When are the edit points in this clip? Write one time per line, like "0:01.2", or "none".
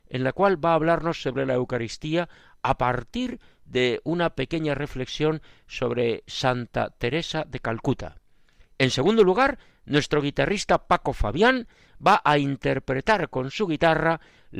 none